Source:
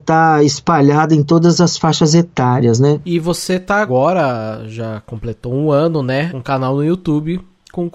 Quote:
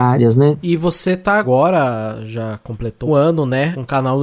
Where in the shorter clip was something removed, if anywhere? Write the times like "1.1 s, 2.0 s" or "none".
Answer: 3.1 s